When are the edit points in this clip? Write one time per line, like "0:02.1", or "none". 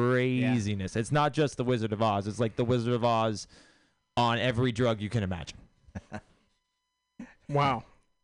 none